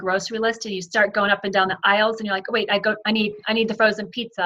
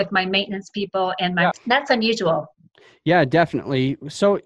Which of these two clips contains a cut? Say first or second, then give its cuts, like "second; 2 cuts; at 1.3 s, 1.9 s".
second; 1 cut; at 1.5 s